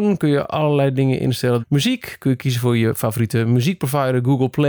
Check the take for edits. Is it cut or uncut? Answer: cut